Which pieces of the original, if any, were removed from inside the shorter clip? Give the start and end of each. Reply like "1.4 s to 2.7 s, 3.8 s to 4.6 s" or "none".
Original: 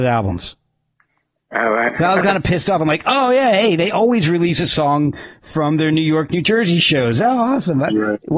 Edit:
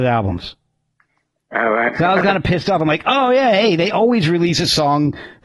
none